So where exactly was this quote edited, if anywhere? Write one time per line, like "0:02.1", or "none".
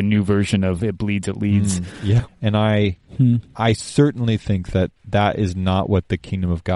0:02.3